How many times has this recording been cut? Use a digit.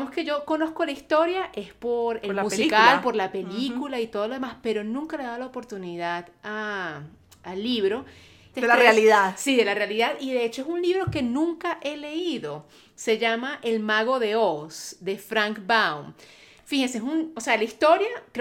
1